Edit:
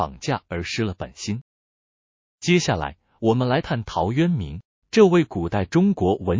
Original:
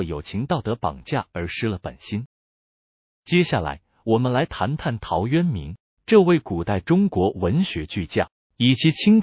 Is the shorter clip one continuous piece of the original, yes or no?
no